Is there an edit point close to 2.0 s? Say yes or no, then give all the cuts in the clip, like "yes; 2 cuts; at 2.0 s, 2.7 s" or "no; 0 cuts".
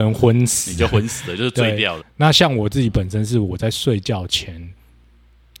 yes; 1 cut; at 2.0 s